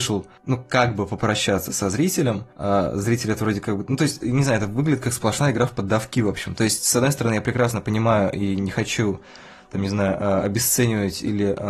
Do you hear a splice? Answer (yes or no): no